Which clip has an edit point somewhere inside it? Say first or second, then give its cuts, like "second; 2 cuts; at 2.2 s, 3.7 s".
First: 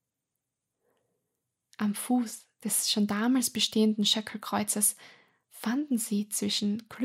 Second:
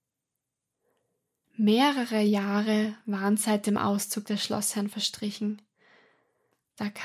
second; 1 cut; at 1.4 s